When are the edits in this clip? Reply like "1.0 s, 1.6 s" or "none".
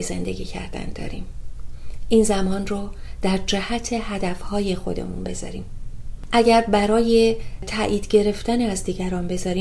none